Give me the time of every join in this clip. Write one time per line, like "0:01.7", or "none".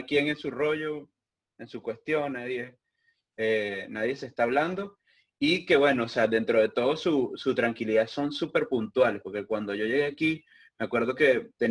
none